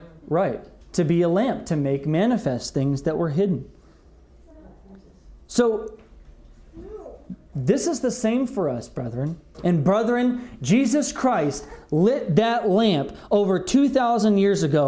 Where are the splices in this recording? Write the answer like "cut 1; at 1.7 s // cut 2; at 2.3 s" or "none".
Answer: cut 1; at 9.5 s